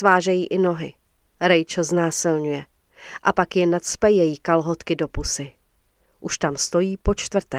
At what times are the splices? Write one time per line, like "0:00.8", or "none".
0:06.1